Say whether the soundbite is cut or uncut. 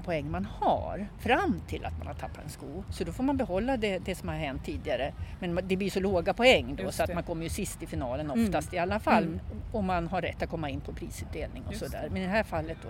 cut